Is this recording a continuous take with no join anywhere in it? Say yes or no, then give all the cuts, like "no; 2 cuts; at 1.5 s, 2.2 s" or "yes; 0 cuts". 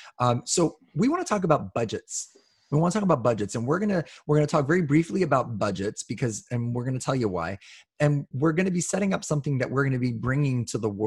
yes; 0 cuts